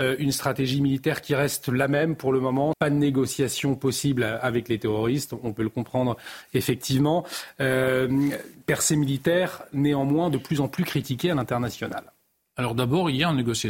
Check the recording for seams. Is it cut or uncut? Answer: cut